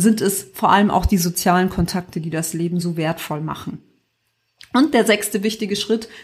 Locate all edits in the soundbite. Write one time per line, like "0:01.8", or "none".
none